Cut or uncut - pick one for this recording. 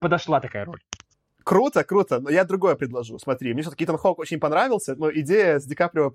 uncut